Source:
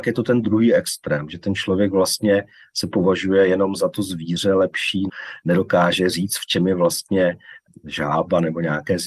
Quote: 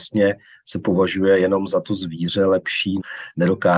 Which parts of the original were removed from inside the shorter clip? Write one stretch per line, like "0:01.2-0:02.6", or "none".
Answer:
none